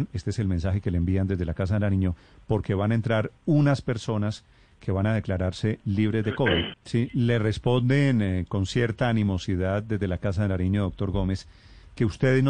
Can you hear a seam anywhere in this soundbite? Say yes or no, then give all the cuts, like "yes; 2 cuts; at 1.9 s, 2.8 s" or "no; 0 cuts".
yes; 1 cut; at 6.7 s